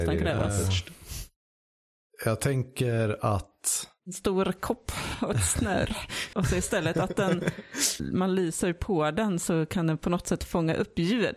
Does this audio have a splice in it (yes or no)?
yes